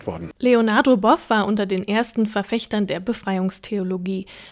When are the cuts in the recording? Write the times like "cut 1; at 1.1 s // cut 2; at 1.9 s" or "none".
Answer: none